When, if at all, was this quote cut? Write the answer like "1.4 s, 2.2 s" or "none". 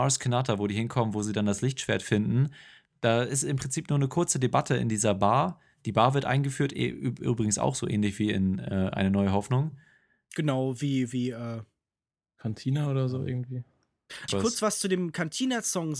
14.3 s